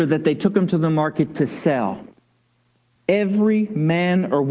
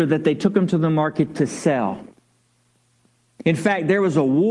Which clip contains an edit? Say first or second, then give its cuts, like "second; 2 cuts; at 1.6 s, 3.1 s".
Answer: first; 1 cut; at 3.0 s